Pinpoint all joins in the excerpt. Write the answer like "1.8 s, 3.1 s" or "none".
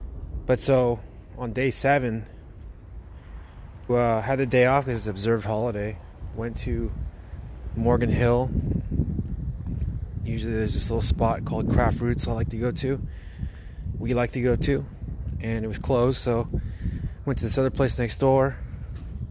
3.9 s